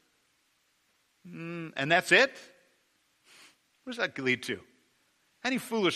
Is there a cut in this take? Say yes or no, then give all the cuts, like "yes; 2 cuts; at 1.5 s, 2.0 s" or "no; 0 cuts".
no; 0 cuts